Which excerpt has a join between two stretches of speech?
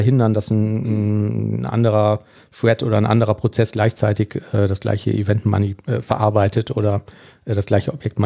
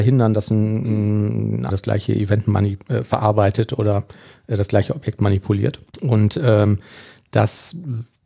second; 2 cuts; at 1.7 s, 5.9 s

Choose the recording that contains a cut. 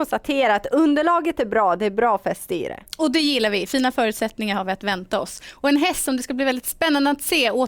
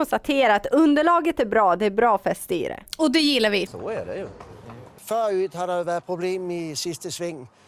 second; 1 cut; at 3.7 s

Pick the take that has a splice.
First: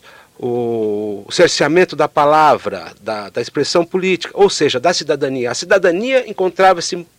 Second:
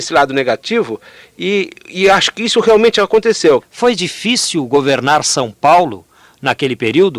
second; 1 cut; at 3.6 s

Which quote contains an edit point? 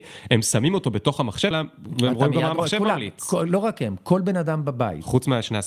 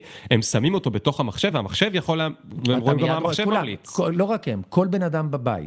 first; 1 cut; at 1.5 s

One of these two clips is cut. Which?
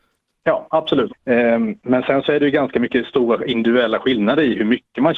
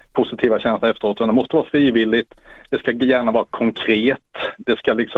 first; 1 cut; at 1.1 s

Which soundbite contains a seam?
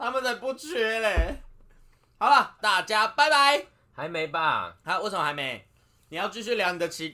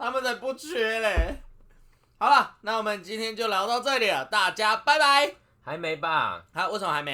first; 1 cut; at 2.6 s

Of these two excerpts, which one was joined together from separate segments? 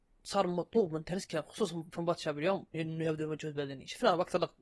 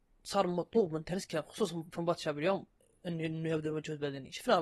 first; 1 cut; at 2.7 s

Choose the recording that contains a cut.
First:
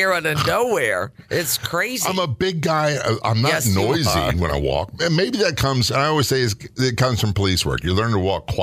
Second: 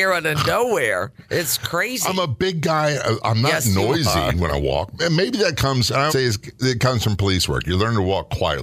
second; 1 cut; at 6.1 s

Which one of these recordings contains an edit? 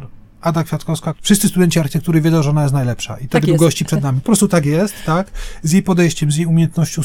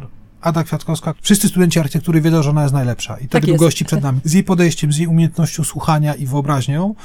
second; 1 cut; at 4.2 s

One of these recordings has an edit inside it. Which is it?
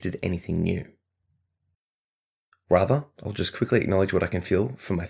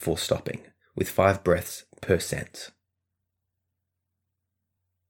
first; 1 cut; at 2.5 s

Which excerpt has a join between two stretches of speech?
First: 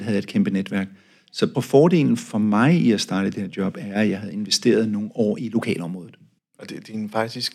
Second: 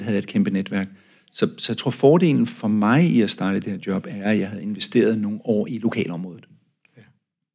first; 2 cuts; at 1.5 s, 6.4 s

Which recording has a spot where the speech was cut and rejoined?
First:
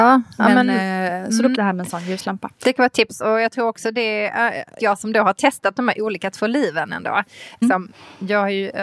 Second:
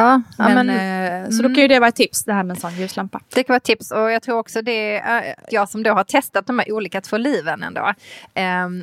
first; 2 cuts; at 1.5 s, 7.6 s

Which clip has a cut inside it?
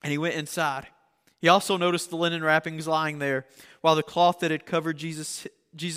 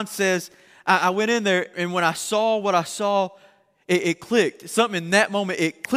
second; 1 cut; at 1.7 s

